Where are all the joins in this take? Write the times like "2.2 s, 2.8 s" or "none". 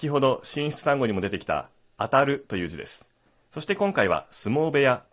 1.9 s, 3.4 s